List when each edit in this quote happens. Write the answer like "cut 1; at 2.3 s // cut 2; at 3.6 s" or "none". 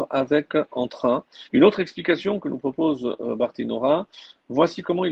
cut 1; at 1.5 s